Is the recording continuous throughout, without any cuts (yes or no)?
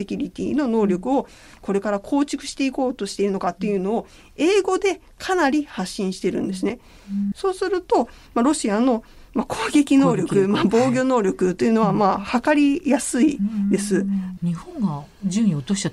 no